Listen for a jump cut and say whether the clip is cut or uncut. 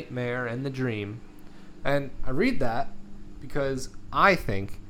cut